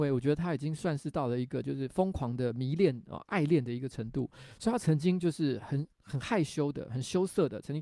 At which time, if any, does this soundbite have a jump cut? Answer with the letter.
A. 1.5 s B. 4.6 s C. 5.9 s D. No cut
C